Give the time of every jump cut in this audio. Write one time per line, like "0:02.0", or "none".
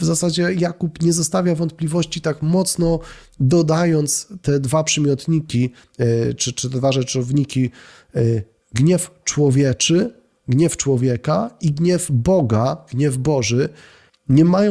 0:06.4